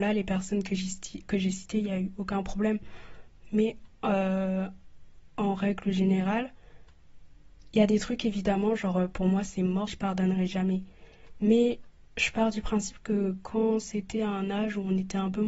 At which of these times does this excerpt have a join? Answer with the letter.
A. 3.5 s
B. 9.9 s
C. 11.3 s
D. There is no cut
B